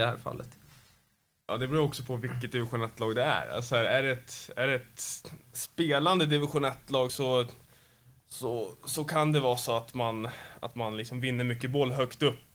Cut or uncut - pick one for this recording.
uncut